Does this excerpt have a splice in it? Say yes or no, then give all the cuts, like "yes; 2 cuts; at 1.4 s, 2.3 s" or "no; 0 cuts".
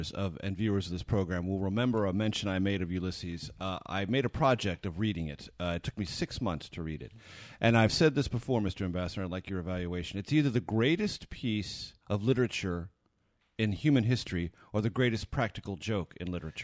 yes; 1 cut; at 12.0 s